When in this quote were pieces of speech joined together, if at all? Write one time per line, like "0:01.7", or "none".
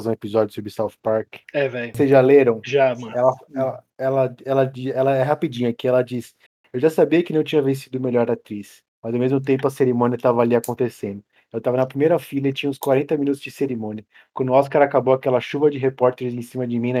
0:01.4